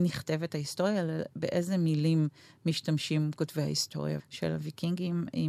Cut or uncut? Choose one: cut